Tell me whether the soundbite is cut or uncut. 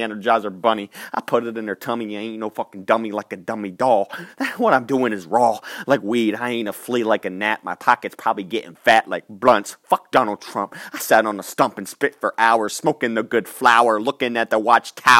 uncut